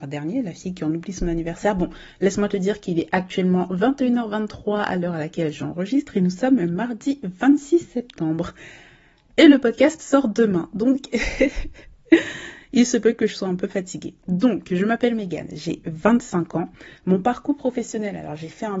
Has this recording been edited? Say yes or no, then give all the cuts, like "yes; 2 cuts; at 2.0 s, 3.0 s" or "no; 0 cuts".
no; 0 cuts